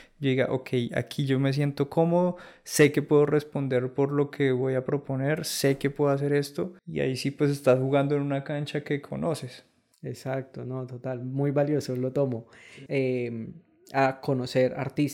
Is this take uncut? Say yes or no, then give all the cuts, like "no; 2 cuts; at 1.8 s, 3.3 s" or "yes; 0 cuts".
no; 2 cuts; at 6.8 s, 12.9 s